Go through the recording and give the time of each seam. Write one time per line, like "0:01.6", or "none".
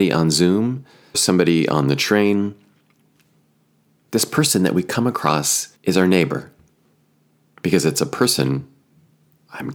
0:01.1
0:05.7